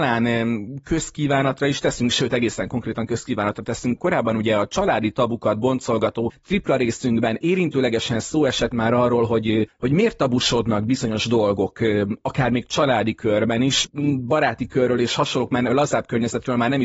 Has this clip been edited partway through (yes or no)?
no